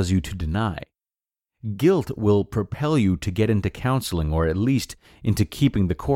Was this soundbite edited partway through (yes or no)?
no